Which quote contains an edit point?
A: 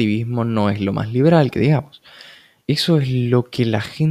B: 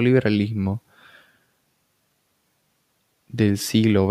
A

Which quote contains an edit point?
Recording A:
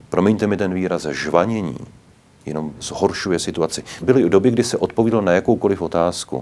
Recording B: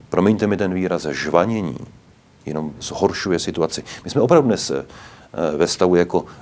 A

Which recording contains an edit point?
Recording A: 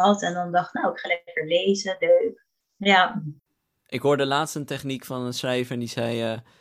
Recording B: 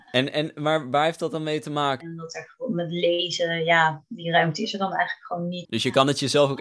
B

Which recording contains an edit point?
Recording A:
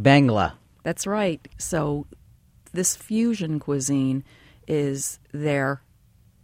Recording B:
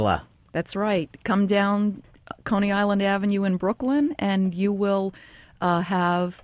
A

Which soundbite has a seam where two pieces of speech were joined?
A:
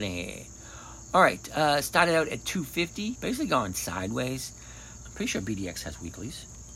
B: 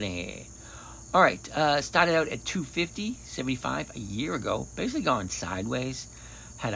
A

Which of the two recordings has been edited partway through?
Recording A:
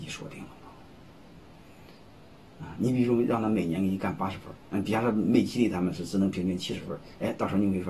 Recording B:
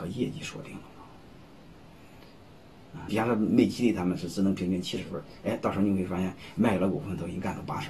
B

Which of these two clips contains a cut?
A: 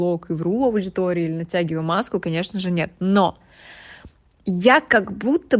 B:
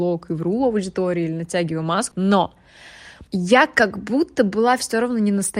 B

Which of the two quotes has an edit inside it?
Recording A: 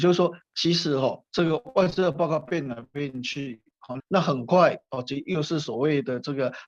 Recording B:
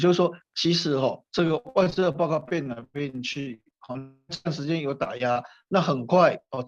A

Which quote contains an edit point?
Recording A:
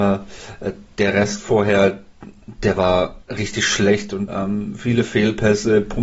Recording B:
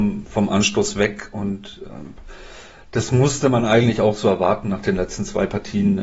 A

